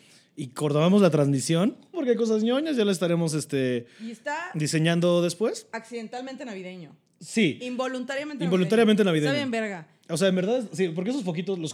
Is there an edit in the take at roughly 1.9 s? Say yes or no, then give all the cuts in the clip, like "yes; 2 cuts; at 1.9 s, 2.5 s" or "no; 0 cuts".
yes; 1 cut; at 1.9 s